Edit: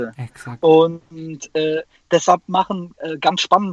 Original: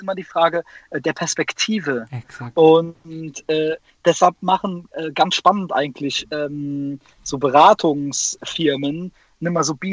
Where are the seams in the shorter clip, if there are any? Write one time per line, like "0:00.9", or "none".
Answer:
none

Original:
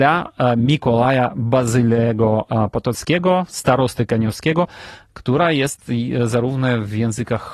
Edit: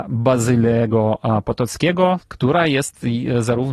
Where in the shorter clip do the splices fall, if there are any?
0:02.2

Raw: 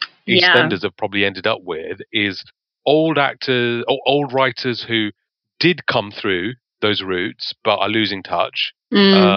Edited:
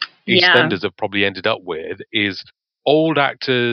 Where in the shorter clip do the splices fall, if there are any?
none

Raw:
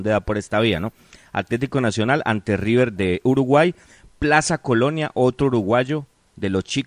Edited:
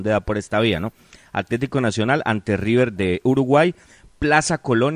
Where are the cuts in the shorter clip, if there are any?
none

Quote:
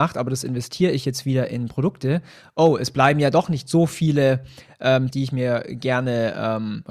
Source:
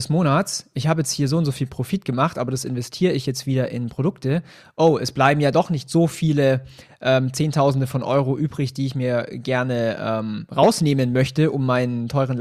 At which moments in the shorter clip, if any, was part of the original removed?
0:05.1

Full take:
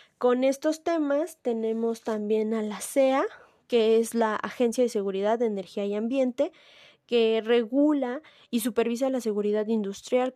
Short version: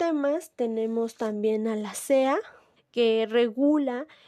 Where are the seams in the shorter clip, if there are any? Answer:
0:02.8

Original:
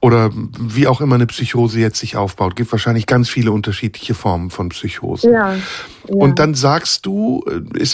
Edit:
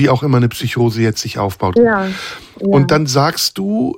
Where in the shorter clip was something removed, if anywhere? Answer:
0:01.8

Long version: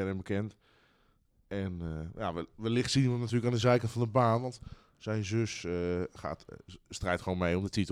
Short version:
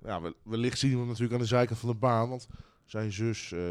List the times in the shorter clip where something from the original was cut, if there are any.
none

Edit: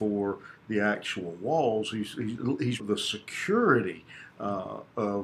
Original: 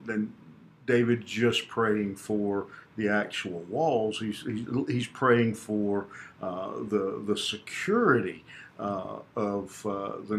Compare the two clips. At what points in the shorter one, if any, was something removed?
0:02.8

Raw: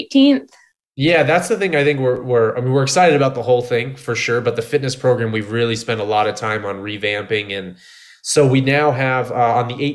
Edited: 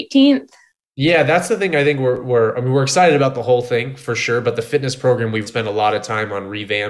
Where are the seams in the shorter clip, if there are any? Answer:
0:05.5

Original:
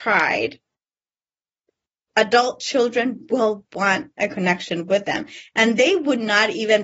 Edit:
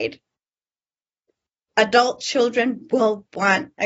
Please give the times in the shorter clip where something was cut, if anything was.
none

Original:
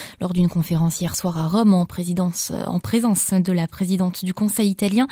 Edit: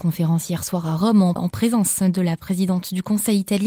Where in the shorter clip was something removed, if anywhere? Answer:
0:01.4

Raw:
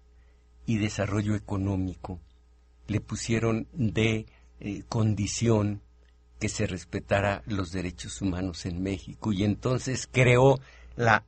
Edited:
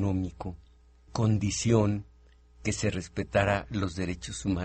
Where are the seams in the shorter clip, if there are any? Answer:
0:01.1

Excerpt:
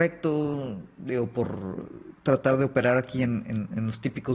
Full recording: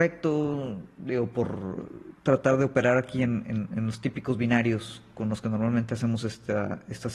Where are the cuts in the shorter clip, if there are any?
none

